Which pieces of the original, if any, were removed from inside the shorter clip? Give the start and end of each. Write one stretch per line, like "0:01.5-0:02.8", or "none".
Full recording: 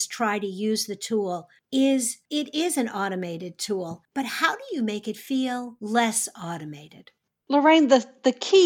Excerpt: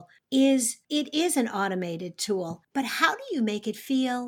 none